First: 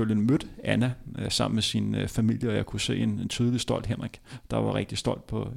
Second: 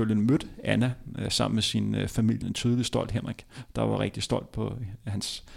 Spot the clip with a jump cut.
second; 1 cut; at 2.4 s

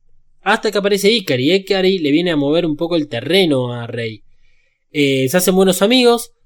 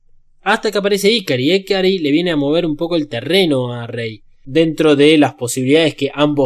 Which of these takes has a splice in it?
second; 1 cut; at 4.4 s

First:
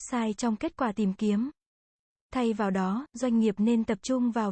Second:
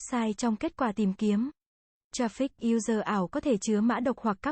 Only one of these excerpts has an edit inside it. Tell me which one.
second; 1 cut; at 2.0 s

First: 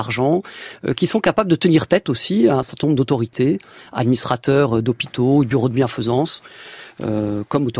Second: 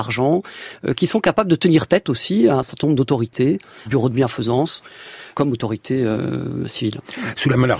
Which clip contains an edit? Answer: second; 2 cuts; at 3.9 s, 5.3 s

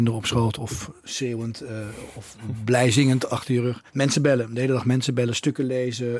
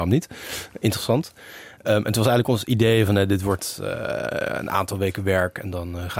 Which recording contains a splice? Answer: first; 1 cut; at 3.9 s

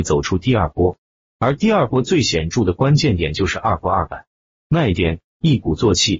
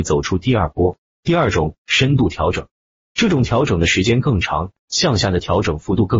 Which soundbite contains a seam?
second; 1 cut; at 1.1 s

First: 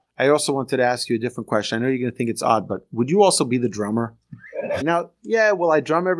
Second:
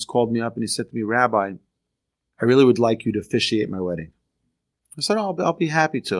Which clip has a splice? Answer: first; 1 cut; at 4.8 s

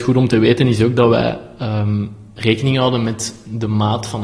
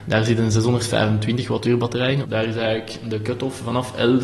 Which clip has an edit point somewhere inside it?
second; 1 cut; at 2.2 s

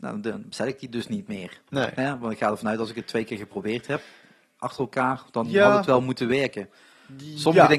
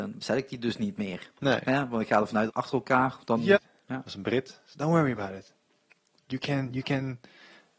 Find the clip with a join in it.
second; 2 cuts; at 2.5 s, 3.5 s

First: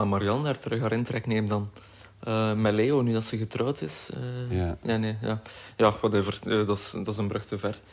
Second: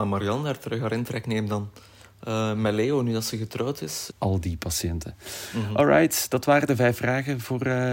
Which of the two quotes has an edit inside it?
second; 1 cut; at 4.1 s

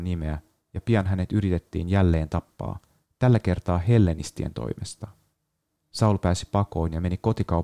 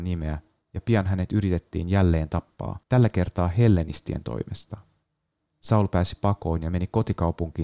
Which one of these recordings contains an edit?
second; 1 cut; at 2.8 s

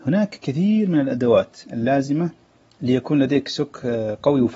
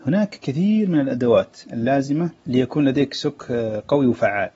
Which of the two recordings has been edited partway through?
second; 1 cut; at 2.4 s

